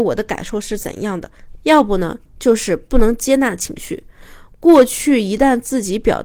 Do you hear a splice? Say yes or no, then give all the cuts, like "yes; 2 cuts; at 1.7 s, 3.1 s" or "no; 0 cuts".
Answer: yes; 1 cut; at 1.6 s